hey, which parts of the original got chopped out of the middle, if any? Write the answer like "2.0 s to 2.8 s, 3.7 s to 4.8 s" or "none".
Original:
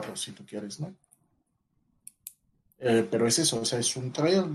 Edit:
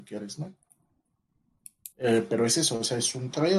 2.3 s to 2.7 s